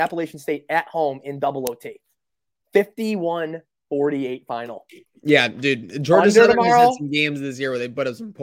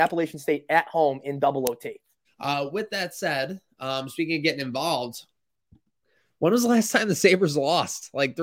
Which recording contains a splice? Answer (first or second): second